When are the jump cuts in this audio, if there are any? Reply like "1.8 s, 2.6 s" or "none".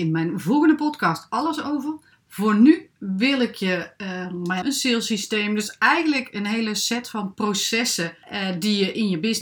4.6 s